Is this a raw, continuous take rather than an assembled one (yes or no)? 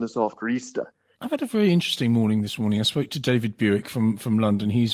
no